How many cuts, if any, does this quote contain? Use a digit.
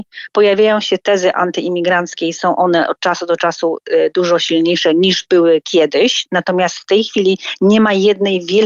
0